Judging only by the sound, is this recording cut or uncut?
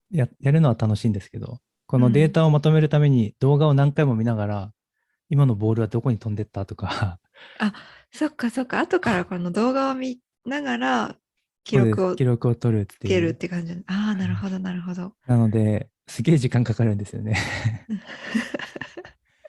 uncut